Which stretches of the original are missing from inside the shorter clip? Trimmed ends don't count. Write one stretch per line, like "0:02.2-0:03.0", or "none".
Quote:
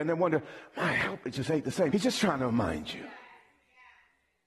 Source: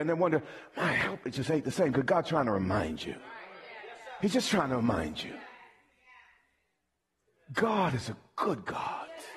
0:01.9-0:04.2